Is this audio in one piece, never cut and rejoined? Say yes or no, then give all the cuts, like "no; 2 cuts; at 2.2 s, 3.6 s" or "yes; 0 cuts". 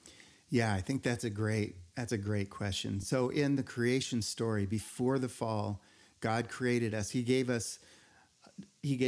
yes; 0 cuts